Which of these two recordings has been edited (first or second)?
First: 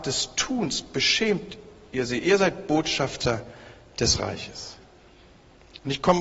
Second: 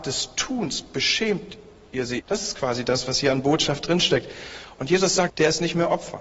second